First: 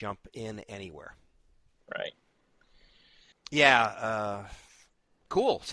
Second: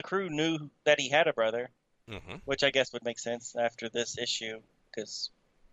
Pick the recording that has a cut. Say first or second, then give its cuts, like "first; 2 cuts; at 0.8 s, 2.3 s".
first; 1 cut; at 3.3 s